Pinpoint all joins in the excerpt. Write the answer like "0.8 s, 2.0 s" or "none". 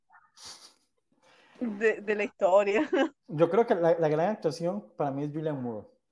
3.2 s